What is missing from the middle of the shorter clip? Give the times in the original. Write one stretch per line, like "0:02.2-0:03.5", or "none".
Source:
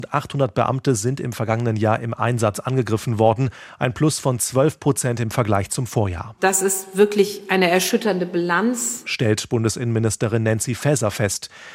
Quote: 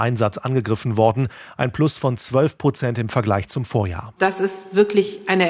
none